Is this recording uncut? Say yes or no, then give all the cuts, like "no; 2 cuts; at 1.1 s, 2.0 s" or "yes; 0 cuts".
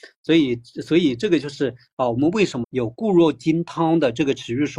no; 1 cut; at 2.6 s